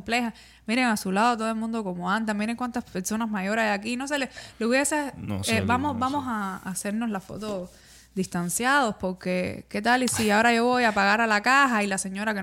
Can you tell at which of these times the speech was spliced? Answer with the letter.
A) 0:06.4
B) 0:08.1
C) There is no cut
C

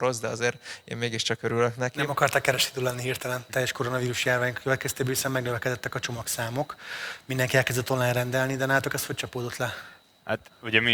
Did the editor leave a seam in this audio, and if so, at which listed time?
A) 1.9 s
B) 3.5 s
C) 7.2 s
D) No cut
B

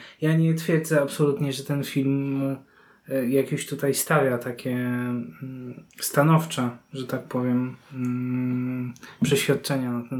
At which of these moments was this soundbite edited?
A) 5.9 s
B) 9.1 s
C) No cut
A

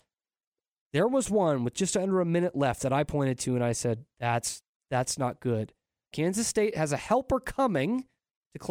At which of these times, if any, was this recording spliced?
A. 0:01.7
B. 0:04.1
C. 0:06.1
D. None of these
C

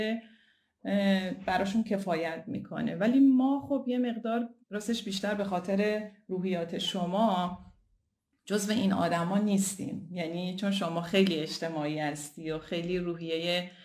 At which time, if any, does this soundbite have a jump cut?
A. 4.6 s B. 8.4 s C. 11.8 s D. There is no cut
A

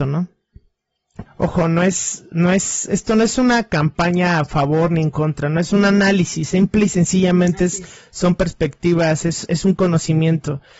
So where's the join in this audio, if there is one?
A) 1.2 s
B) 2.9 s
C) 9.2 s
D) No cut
A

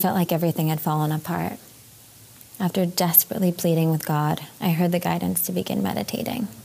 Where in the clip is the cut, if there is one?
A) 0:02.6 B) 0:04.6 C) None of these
B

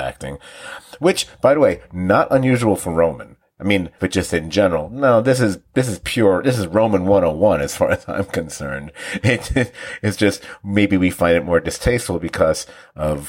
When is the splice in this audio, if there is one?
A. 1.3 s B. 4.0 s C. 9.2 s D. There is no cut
B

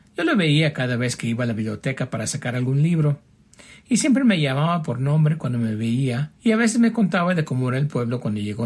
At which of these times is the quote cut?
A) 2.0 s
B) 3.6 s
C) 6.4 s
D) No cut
C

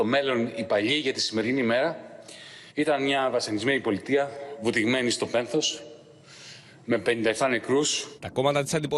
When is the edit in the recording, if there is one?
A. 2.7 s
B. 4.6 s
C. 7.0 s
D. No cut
A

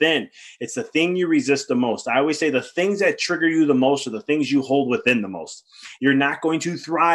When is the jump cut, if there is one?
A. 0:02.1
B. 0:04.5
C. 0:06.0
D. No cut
C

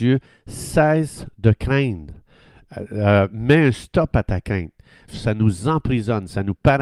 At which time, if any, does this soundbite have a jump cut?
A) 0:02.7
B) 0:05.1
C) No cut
B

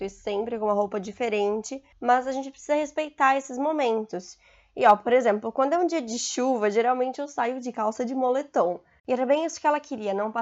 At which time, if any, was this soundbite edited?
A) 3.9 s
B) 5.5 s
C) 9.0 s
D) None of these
C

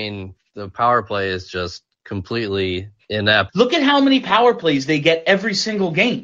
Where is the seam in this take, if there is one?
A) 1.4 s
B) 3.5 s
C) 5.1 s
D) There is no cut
B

